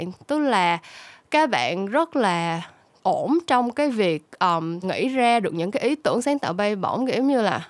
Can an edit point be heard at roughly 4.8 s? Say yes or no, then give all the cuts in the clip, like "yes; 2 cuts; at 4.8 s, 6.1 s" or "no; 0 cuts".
yes; 1 cut; at 4.8 s